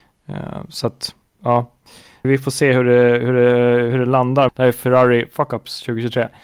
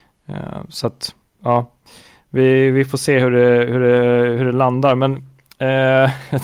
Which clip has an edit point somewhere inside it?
first; 2 cuts; at 2.2 s, 4.5 s

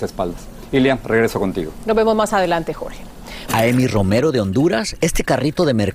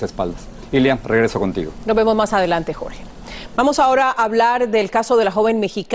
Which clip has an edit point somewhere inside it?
first; 1 cut; at 3.5 s

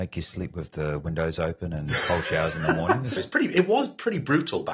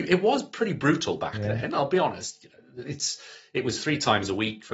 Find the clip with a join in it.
first; 1 cut; at 3.2 s

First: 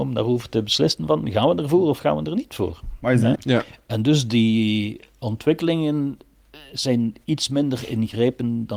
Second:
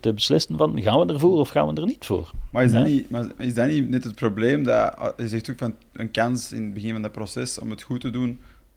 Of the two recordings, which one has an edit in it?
first; 1 cut; at 3.3 s

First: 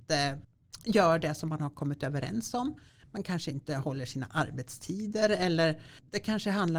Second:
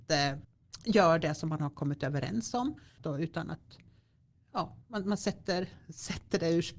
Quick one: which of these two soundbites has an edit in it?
second; 1 cut; at 3.0 s

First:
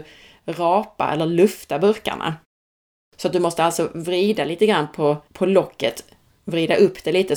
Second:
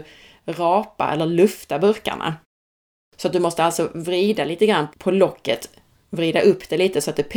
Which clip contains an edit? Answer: second; 1 cut; at 4.9 s

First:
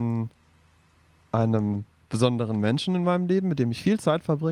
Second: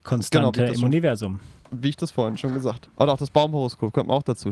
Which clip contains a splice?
second; 1 cut; at 2.9 s

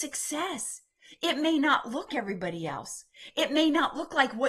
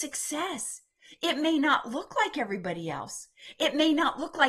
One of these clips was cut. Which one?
first; 1 cut; at 2.1 s

